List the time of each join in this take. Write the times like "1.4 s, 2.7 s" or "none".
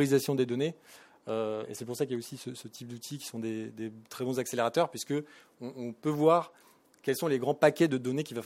none